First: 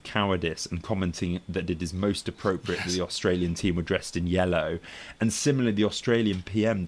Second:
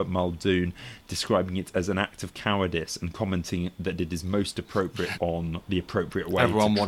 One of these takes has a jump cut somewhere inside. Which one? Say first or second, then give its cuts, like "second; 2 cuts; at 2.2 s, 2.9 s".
second; 1 cut; at 5.1 s